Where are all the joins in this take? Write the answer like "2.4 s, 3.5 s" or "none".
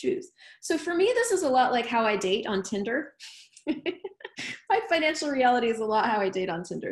none

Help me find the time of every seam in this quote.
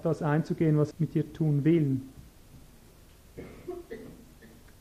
0.9 s

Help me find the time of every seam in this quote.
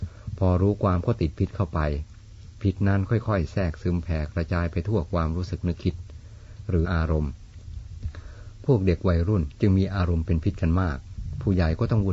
6.8 s

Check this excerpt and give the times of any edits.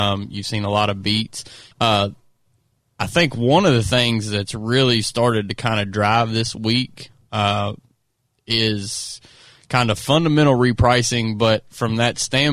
1.7 s

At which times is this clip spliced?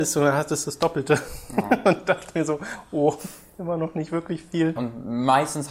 4.8 s

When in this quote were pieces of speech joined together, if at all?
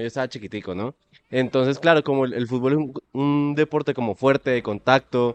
none

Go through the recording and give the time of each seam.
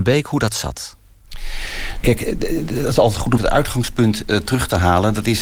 3.4 s

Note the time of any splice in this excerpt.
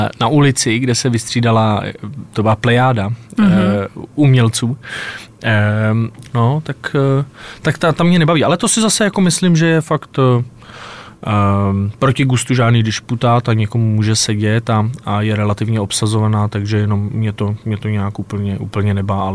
6.3 s

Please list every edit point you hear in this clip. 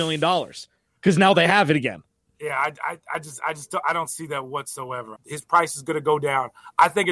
5.2 s

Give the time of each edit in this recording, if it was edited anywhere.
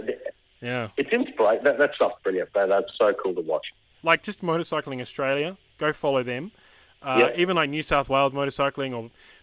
4.0 s

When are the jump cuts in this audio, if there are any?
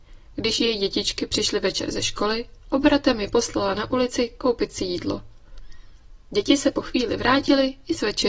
none

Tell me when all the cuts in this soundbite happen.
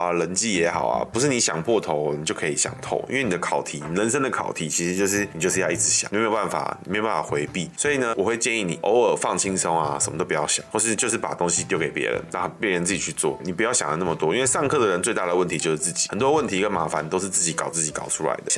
8.1 s

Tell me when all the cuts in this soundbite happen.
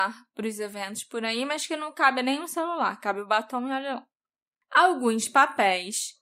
none

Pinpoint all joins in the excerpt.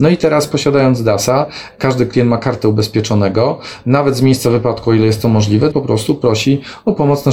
5.7 s

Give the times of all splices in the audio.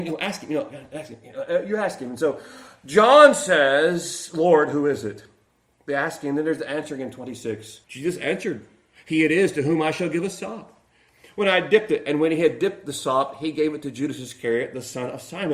7.8 s

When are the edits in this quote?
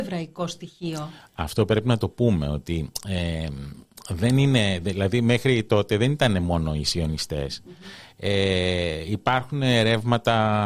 none

